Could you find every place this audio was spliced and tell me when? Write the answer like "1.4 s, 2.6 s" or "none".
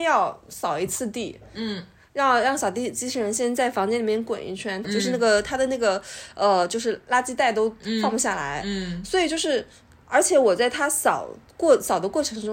4.8 s